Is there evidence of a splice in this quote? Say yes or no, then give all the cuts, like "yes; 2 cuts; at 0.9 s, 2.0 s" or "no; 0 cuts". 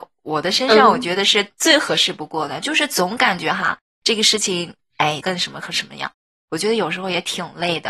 yes; 1 cut; at 5.2 s